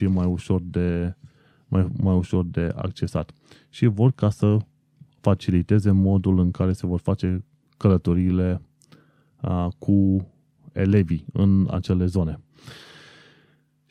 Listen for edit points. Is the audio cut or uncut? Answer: uncut